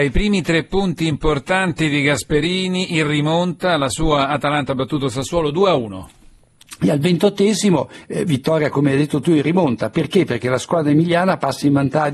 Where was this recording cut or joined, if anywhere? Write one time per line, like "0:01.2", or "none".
none